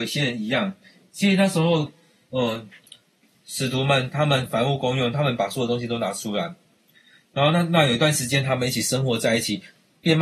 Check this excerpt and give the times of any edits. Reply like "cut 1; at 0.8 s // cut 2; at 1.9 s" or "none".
none